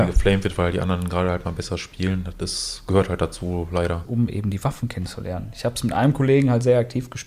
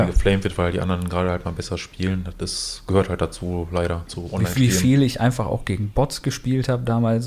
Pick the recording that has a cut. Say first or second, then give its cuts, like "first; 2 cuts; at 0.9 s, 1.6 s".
first; 1 cut; at 4.0 s